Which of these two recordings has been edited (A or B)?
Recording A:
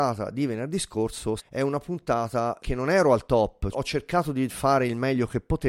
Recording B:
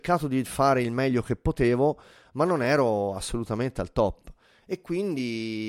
A